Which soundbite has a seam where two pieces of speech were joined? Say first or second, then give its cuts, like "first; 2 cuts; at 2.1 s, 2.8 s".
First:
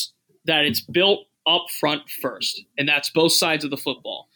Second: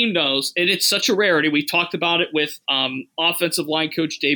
second; 1 cut; at 2.6 s